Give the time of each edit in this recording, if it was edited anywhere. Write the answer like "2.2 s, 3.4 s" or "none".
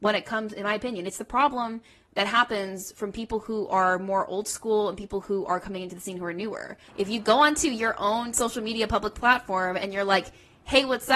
6.9 s